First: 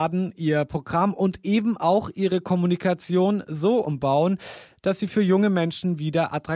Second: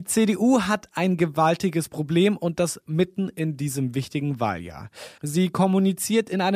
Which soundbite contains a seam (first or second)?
second